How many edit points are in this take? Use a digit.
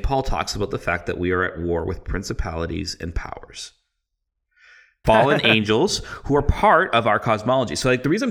1